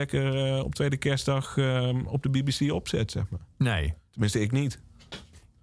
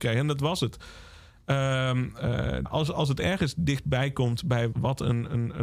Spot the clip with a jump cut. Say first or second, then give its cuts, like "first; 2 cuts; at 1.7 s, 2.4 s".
second; 2 cuts; at 2.7 s, 4.7 s